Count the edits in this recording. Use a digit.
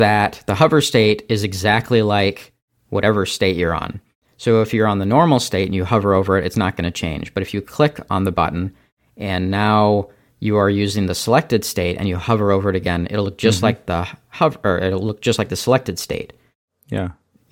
0